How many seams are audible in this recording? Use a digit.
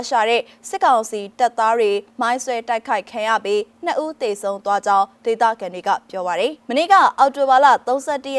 1